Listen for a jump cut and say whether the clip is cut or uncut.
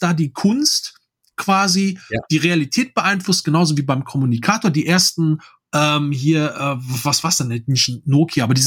uncut